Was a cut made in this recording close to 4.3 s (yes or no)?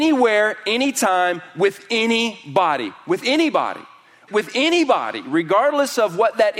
yes